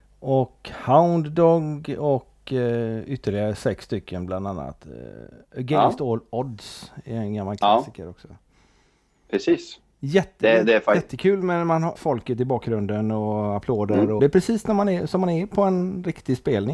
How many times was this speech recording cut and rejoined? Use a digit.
2